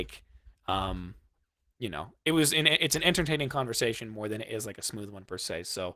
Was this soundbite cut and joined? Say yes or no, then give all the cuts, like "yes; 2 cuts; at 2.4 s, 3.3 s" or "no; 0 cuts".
no; 0 cuts